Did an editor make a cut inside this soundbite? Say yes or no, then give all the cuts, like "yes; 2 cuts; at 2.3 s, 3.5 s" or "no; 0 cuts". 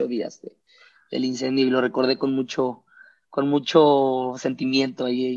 no; 0 cuts